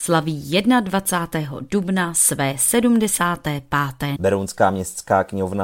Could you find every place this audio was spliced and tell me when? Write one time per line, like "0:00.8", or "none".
0:04.2